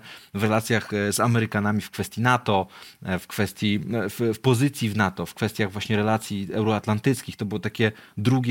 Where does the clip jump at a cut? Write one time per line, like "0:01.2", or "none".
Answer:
none